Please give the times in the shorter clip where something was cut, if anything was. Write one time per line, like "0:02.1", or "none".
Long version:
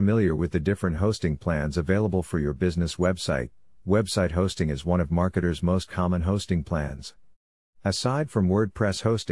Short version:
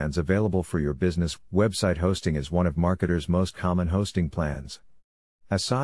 0:01.4